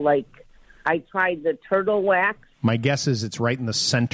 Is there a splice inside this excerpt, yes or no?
yes